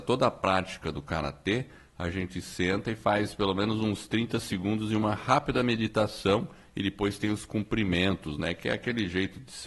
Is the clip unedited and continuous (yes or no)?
yes